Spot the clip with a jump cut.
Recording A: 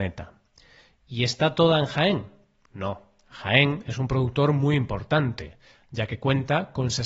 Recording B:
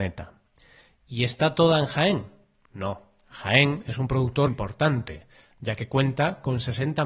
B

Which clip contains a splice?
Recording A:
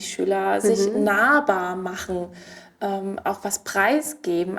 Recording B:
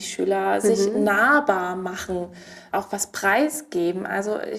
B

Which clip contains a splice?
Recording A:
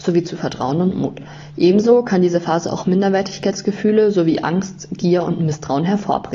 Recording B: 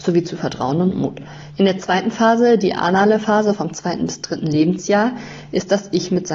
B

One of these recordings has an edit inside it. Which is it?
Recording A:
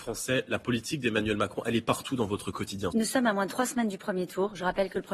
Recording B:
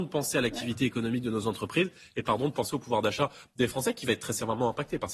A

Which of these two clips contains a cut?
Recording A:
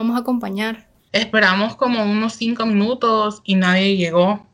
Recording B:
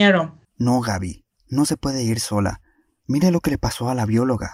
A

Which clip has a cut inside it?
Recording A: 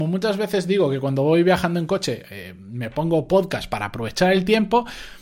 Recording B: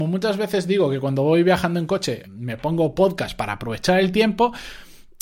B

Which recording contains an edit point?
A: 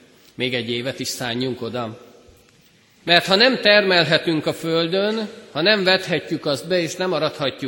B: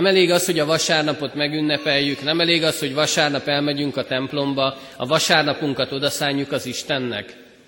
A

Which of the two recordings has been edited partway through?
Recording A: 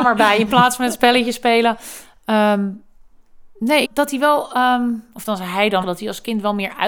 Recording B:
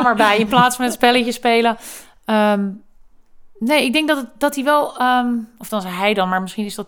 A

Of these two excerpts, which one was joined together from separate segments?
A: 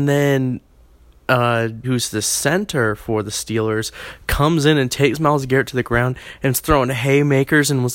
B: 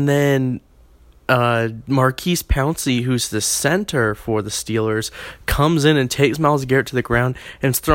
A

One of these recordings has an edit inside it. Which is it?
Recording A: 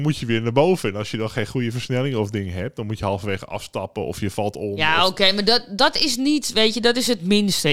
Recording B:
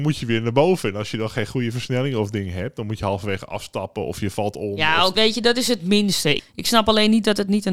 B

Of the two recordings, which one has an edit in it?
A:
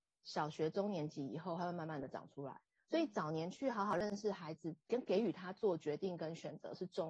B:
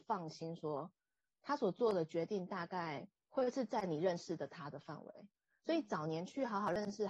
A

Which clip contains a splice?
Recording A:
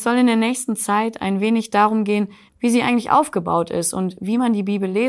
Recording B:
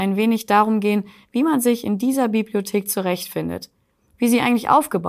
A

